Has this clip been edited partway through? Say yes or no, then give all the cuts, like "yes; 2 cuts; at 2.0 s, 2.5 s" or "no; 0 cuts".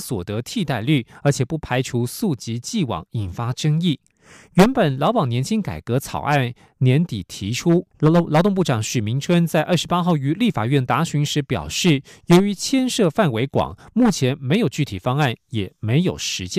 yes; 1 cut; at 7.9 s